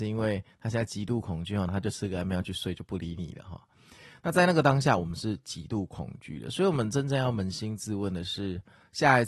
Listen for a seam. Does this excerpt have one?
yes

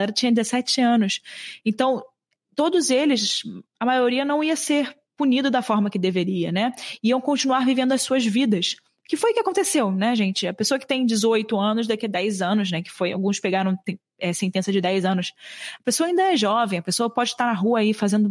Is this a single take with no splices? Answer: yes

